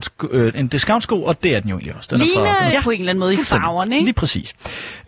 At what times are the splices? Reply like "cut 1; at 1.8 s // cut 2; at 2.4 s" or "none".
cut 1; at 2.7 s